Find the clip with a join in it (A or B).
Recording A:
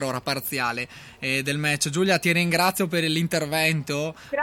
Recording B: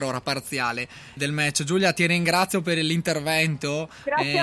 B